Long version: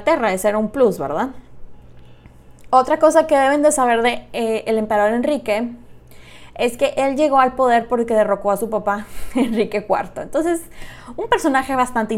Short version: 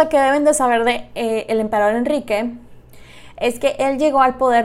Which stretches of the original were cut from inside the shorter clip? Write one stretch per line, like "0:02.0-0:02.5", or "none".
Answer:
none